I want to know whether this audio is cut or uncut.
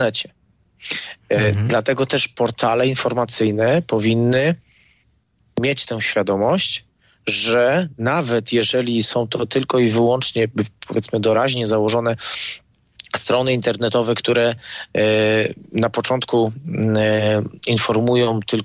uncut